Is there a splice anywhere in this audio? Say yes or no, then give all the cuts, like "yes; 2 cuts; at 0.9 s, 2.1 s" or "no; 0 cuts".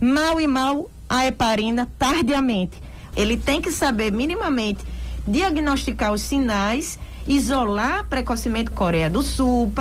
yes; 2 cuts; at 3.1 s, 8.7 s